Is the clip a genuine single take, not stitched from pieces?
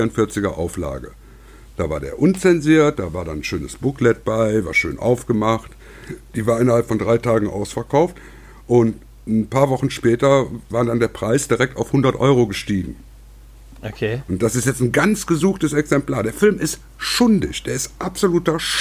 yes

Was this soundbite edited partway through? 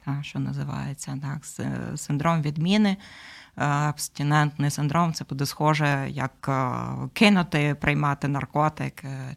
no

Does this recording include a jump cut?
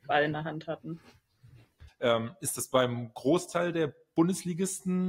yes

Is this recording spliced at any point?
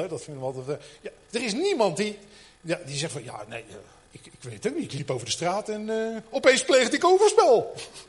no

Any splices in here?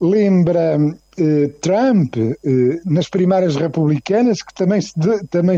no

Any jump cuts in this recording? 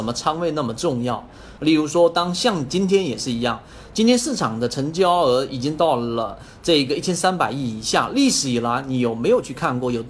yes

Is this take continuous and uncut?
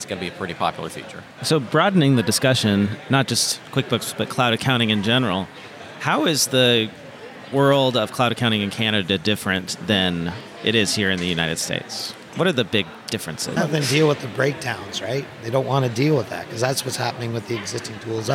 no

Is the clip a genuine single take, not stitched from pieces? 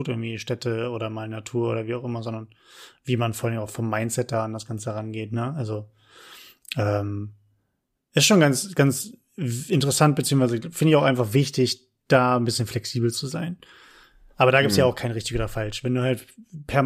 yes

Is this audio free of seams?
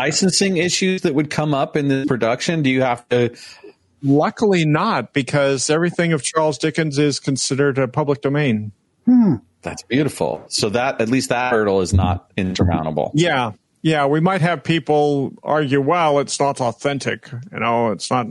yes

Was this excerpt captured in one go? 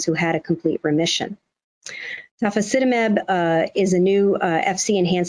yes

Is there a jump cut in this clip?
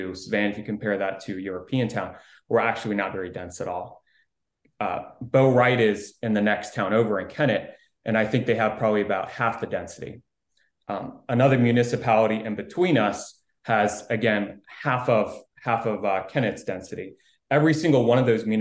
no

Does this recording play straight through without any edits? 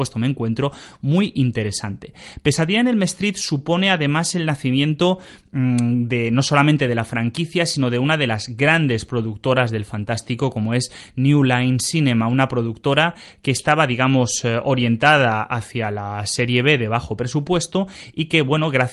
yes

